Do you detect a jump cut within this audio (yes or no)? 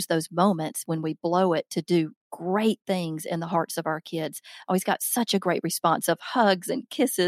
no